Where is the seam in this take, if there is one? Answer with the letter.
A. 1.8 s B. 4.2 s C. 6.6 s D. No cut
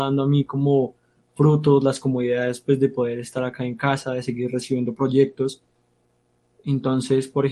C